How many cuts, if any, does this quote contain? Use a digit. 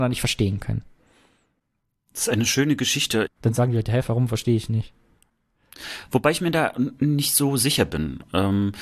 1